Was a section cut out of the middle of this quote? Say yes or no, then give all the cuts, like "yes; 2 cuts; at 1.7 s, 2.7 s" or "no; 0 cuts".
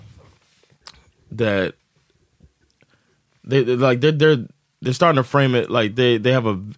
no; 0 cuts